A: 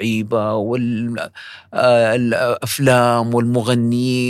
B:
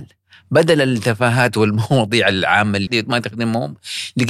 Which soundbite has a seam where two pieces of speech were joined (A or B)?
B